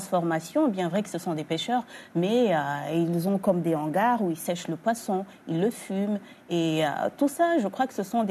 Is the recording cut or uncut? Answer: uncut